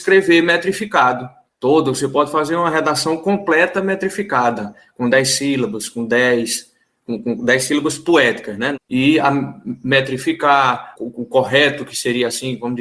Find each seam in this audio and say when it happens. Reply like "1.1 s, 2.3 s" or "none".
8.7 s, 10.9 s